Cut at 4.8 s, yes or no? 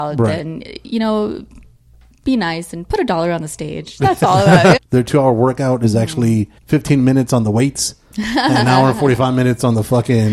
yes